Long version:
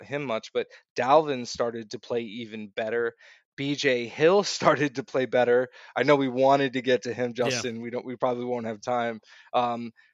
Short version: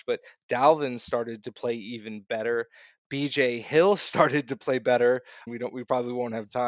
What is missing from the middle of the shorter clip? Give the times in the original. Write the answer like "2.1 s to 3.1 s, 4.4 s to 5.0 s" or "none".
5.9 s to 7.8 s

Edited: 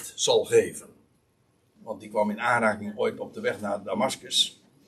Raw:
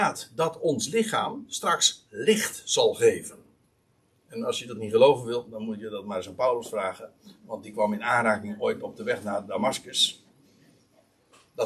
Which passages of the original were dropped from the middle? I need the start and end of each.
4.3 s to 7.4 s

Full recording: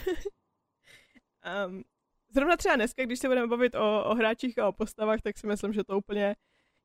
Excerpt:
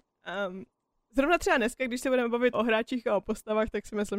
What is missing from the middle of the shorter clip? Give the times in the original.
3.7 s to 4.0 s

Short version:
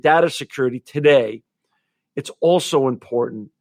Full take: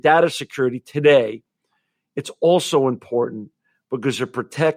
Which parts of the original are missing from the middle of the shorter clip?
none

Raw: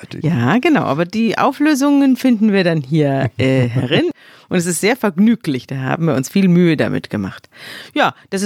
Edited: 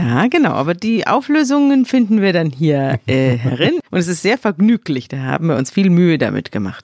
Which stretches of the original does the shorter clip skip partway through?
4.2 s to 4.4 s

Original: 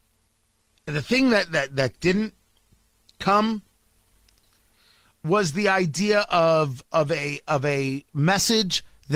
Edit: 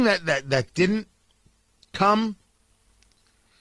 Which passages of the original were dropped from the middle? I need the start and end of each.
none

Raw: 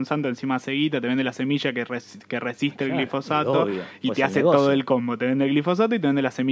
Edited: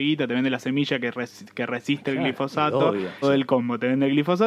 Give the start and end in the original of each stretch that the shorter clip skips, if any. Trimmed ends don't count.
4.0 s to 4.6 s

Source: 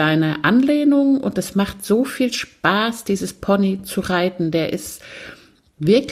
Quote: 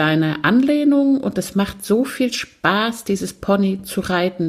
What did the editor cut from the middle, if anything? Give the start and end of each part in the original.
none

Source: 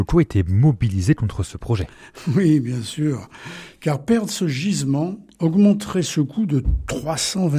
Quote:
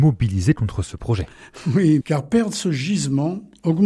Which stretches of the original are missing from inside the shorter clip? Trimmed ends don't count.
2.6 s to 3.8 s

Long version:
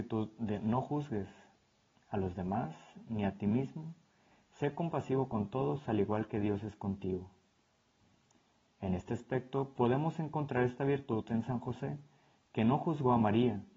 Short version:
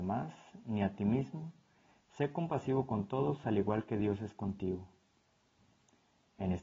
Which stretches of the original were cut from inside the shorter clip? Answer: none

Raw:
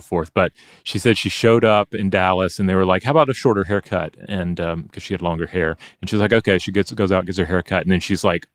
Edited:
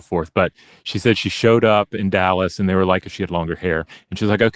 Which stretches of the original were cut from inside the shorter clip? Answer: 3.0 s to 4.9 s

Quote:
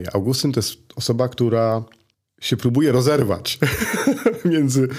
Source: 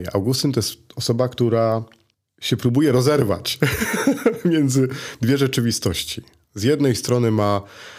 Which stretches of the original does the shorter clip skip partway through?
none

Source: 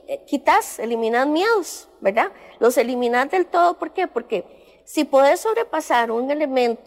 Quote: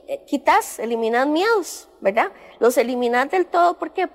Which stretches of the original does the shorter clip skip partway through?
none

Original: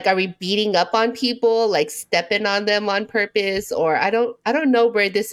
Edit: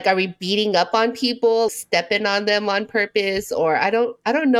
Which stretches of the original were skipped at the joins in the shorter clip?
1.7 s to 1.9 s

